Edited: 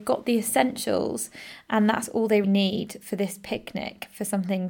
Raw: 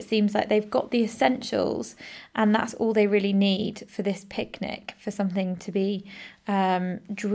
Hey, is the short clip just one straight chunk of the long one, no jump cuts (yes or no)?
no